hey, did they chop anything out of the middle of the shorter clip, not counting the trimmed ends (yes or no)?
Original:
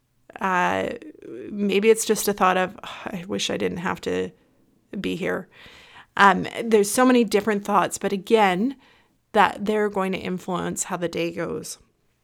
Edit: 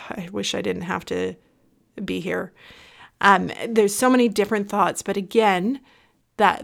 no